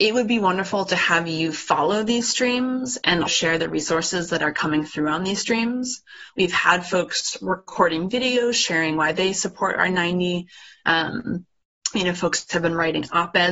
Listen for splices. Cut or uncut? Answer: cut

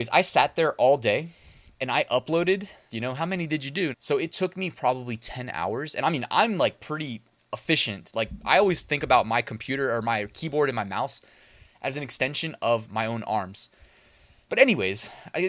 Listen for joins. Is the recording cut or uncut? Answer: cut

